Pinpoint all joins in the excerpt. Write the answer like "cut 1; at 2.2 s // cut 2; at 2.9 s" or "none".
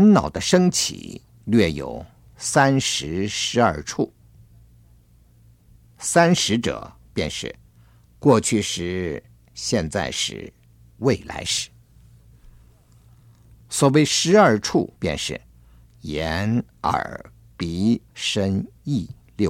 cut 1; at 15.0 s // cut 2; at 18.1 s